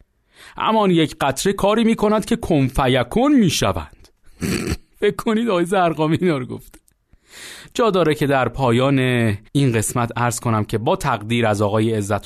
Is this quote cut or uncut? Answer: cut